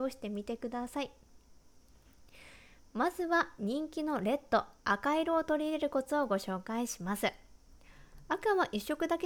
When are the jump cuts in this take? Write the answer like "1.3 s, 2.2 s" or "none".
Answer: 4.8 s